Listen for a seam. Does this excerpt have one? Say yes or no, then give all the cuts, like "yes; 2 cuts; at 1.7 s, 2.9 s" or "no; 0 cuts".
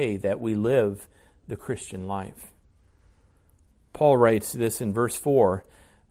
no; 0 cuts